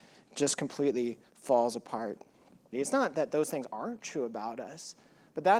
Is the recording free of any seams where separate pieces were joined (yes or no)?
no